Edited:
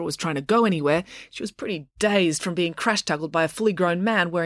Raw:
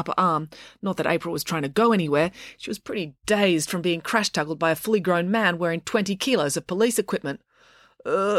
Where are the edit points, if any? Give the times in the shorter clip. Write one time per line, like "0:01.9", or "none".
none